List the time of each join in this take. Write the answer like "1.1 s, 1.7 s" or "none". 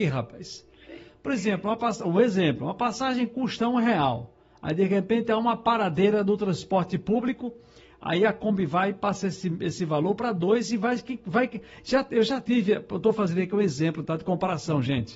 none